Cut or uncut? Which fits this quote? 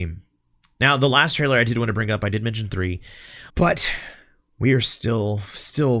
cut